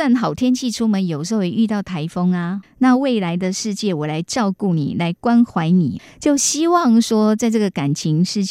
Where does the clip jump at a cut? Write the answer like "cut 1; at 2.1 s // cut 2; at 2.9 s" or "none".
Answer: none